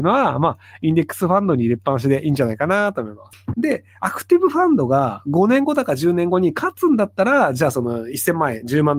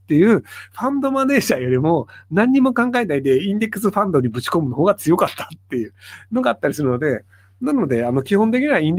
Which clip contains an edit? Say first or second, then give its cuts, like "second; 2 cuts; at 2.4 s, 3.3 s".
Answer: first; 1 cut; at 3.5 s